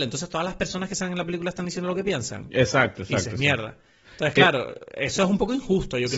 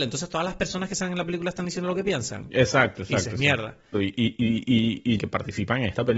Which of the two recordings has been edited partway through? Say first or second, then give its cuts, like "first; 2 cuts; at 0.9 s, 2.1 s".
second; 2 cuts; at 3.9 s, 5.2 s